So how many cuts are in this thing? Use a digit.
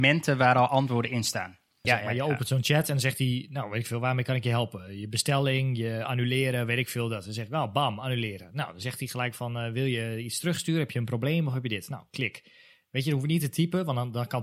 1